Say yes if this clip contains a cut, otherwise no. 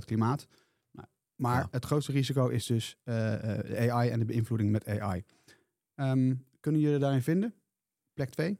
no